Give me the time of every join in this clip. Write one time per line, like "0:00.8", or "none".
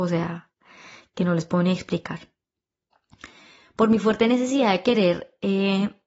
none